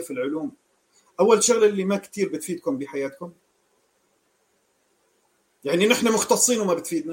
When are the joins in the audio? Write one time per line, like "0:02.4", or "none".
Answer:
none